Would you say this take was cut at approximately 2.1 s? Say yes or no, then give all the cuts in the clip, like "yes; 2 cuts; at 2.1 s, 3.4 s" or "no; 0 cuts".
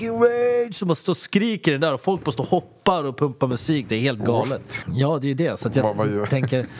no; 1 cut; at 4.8 s